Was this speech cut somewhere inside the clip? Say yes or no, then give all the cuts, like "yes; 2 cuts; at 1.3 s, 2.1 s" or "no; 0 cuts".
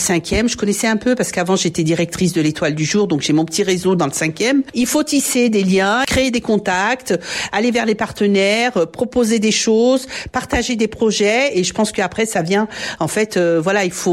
no; 0 cuts